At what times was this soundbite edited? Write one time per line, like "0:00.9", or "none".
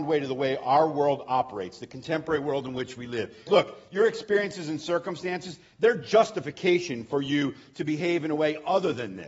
0:03.5